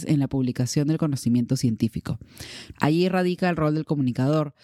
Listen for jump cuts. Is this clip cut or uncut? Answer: cut